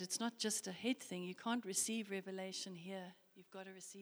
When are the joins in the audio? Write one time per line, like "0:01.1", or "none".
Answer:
none